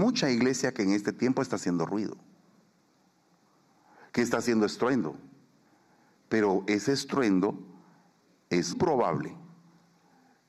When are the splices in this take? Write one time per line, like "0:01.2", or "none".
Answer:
0:08.7